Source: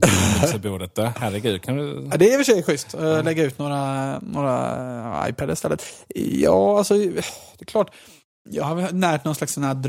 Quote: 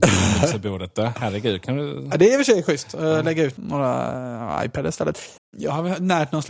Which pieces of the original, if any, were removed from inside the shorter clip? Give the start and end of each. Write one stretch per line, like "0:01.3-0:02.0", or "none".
0:03.6-0:04.2
0:06.0-0:08.3